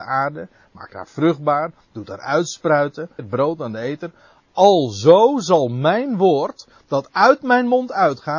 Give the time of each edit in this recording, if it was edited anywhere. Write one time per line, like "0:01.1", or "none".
0:03.2